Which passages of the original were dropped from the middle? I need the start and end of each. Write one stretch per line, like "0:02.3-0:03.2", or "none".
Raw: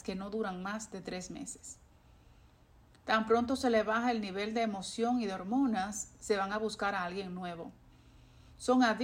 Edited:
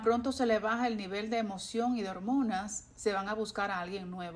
none